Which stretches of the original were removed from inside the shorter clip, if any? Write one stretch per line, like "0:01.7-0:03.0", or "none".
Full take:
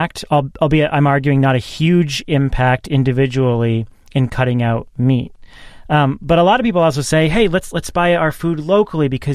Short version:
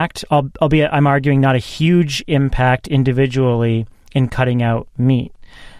none